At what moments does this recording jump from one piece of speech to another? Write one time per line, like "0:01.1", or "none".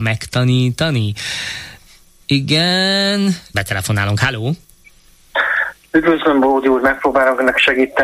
0:03.5

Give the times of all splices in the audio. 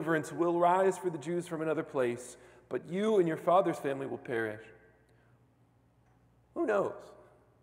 none

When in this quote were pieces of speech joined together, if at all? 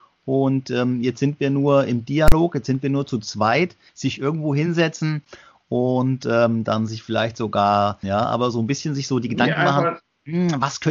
0:03.9
0:08.0

